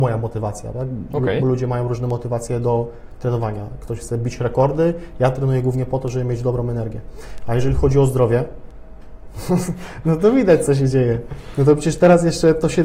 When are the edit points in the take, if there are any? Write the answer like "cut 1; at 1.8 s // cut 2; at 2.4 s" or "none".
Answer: none